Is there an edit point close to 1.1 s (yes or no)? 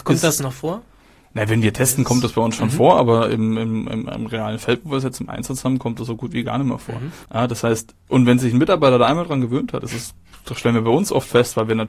no